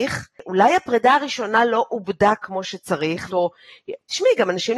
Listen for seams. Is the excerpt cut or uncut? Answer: cut